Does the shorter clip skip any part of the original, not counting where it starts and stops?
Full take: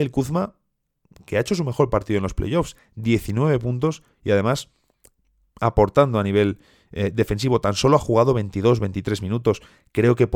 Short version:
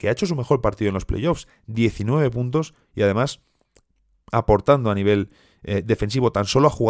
no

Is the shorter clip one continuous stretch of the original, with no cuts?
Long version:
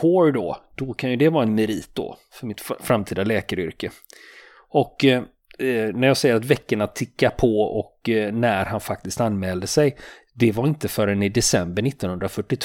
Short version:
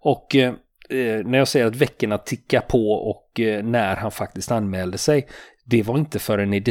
yes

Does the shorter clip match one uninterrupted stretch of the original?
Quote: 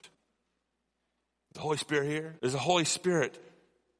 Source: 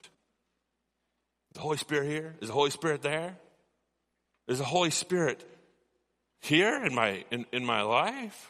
no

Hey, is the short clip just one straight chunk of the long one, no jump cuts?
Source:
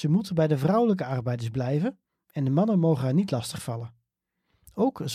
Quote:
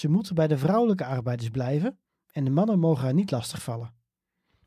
yes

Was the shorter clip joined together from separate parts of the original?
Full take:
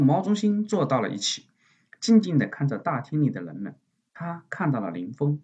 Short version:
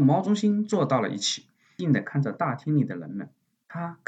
yes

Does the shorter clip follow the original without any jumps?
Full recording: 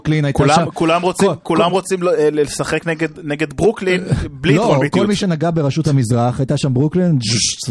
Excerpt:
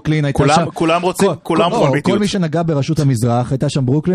no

